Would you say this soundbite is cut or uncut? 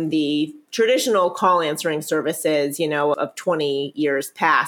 cut